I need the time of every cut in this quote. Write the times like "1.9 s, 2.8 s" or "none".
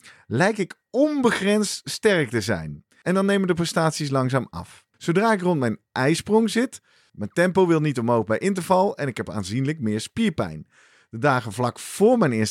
3.0 s, 4.9 s, 7.1 s